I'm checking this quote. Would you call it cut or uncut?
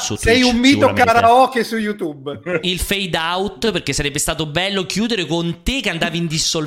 cut